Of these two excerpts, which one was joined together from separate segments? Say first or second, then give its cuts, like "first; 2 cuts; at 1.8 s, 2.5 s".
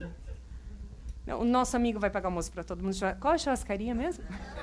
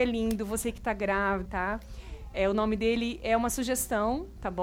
second; 1 cut; at 1.5 s